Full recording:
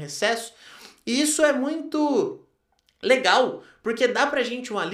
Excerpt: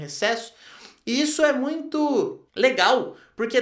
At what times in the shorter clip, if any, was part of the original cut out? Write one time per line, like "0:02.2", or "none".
0:02.5